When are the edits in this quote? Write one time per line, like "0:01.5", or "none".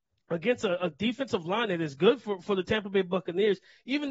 none

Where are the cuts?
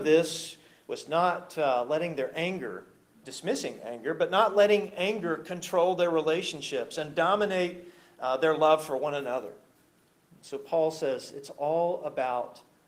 0:03.2

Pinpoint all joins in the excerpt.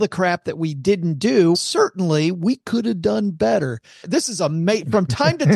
0:01.5
0:04.0

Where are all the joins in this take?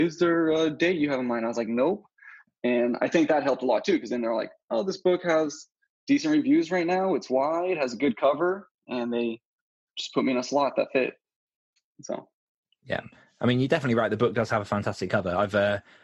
none

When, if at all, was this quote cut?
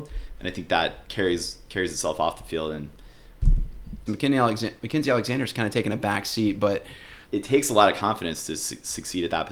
0:04.1
0:07.2

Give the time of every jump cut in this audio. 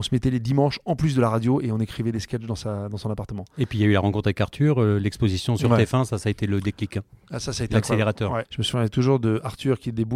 0:08.4

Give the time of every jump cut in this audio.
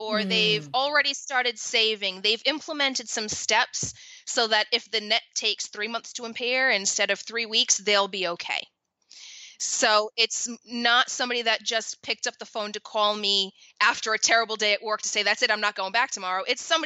none

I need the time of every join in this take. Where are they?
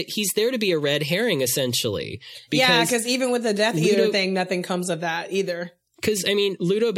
none

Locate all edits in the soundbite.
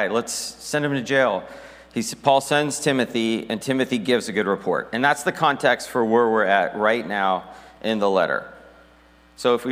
none

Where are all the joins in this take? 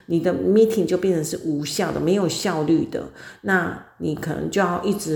none

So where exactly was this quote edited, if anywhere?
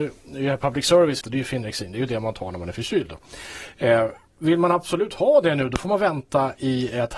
0:01.2

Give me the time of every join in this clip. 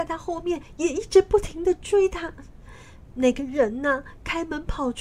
none

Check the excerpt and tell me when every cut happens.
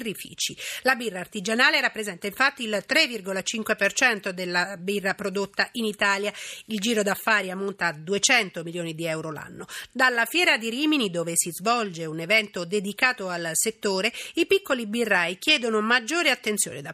none

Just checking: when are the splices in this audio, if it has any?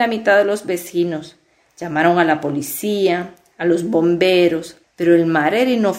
0:04.8

